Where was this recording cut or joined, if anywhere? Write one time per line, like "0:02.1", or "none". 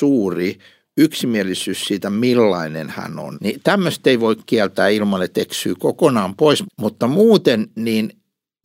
0:03.3
0:06.6